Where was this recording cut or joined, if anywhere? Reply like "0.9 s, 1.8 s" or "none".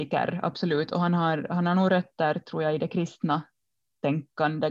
none